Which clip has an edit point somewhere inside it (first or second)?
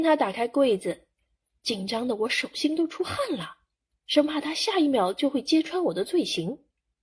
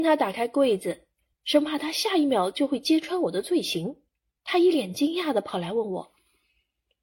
second